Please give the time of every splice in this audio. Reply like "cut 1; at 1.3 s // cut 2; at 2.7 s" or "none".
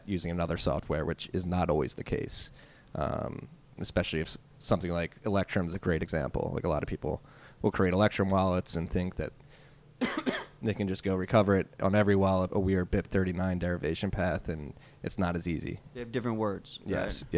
cut 1; at 12.5 s